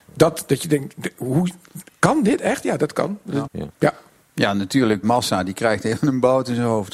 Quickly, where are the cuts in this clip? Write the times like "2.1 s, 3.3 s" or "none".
3.5 s, 5.0 s